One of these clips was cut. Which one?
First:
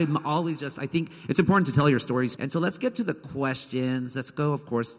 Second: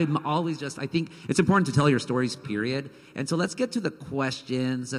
first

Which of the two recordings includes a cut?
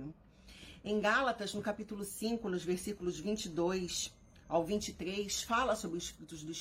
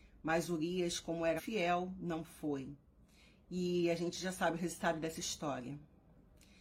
second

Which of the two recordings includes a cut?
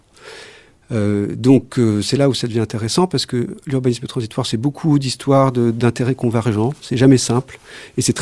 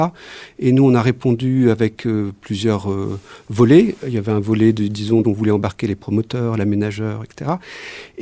second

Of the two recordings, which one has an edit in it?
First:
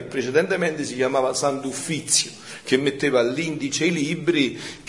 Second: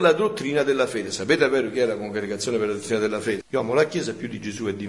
second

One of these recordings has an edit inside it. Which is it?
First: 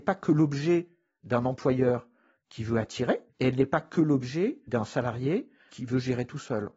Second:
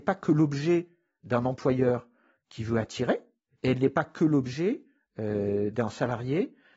first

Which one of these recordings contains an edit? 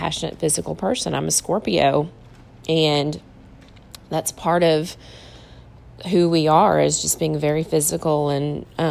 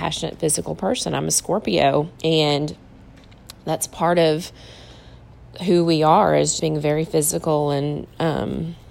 second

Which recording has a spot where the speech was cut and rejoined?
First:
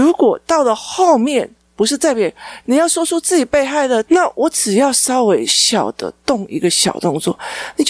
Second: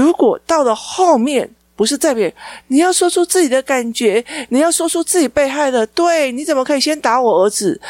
first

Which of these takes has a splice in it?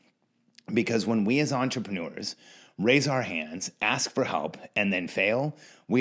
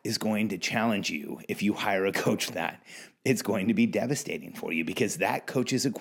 second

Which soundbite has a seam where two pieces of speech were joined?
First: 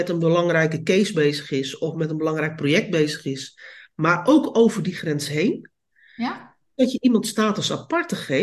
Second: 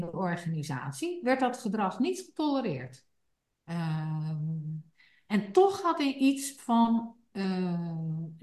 second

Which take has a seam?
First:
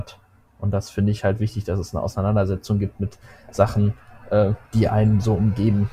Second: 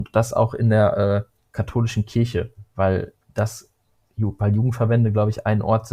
first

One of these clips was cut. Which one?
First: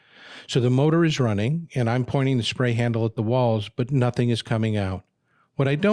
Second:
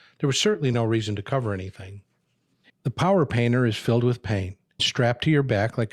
second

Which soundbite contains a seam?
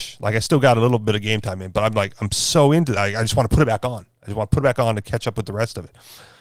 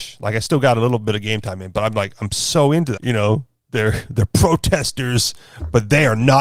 second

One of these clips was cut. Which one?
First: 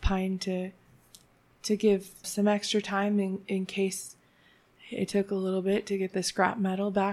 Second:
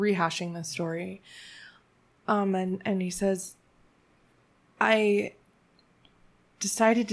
first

